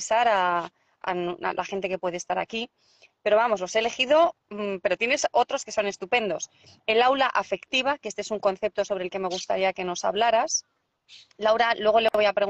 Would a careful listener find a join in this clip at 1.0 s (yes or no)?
yes